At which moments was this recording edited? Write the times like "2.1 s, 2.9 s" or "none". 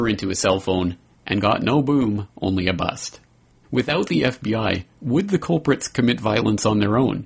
3.6 s, 4.9 s